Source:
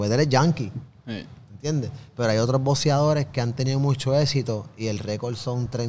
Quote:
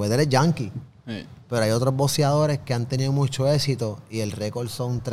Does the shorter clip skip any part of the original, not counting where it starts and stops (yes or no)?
yes